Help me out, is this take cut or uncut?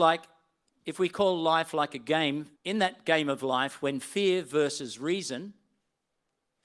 cut